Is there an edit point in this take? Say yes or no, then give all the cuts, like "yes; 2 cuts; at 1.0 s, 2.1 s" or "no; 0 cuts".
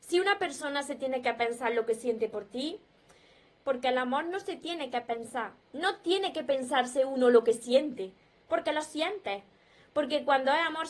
yes; 1 cut; at 3.5 s